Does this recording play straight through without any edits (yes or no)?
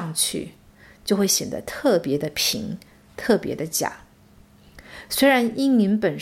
yes